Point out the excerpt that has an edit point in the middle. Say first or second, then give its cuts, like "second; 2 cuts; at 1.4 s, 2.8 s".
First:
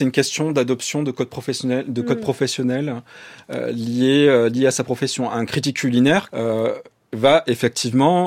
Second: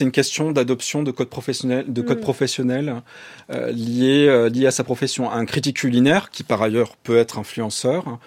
first; 1 cut; at 6.3 s